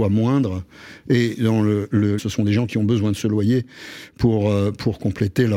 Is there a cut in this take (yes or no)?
yes